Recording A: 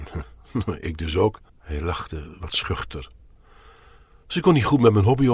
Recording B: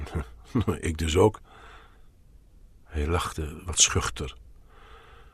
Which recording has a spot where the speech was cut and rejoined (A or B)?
A